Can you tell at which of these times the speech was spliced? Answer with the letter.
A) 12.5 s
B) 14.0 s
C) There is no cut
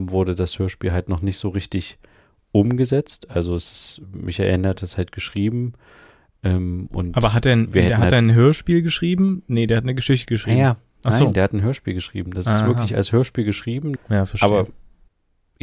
B